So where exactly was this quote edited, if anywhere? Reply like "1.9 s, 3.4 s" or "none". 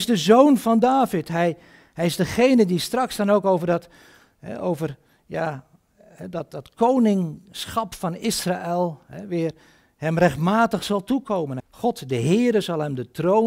11.6 s